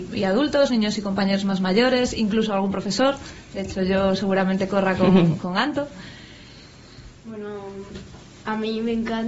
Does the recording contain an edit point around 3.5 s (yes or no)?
no